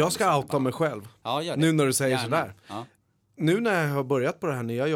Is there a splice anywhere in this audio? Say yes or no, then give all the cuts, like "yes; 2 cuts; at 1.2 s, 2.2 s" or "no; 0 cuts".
no; 0 cuts